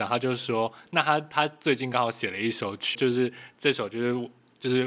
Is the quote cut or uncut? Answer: cut